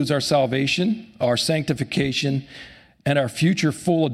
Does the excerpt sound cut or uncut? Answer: uncut